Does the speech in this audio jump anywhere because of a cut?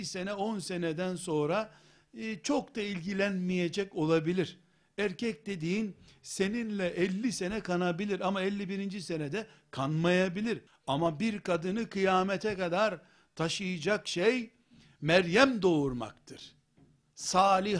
yes; 1 cut; at 10.7 s

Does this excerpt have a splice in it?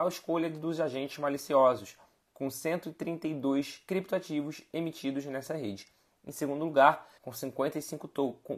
yes; 1 cut; at 7.2 s

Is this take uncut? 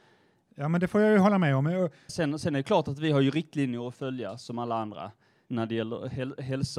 no; 2 cuts; at 2.1 s, 5.5 s

